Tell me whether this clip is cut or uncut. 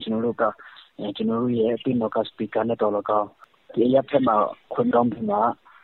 uncut